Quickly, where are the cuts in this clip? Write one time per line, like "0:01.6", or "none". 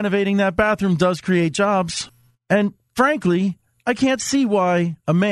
0:02.3